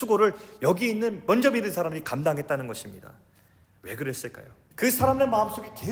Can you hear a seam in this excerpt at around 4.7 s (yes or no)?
yes